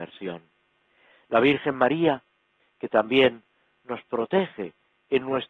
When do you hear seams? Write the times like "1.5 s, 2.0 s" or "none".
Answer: 2.6 s

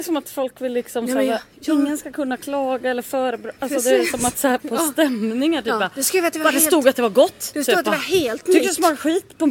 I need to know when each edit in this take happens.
4.6 s

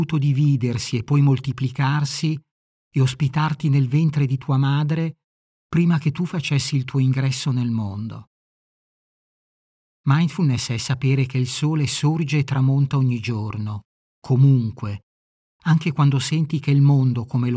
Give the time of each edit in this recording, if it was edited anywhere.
9.9 s

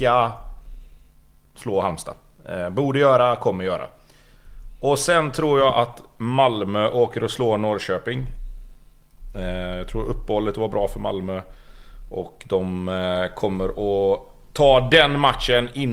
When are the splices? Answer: none

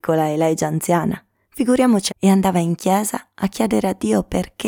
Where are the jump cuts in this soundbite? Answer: 2.1 s

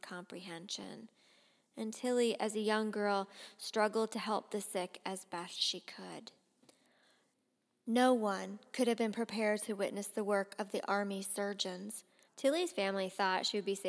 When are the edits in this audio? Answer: 12.3 s

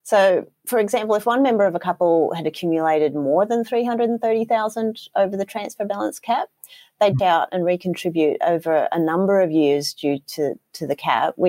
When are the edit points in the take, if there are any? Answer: 7.2 s

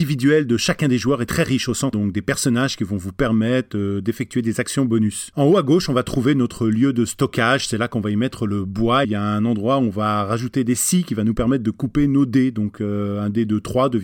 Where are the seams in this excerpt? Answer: 1.9 s, 5.3 s, 9.0 s

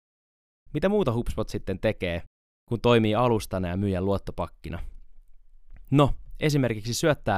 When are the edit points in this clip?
none

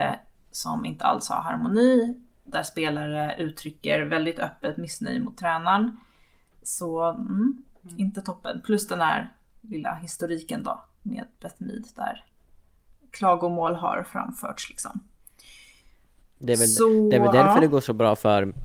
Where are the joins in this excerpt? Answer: none

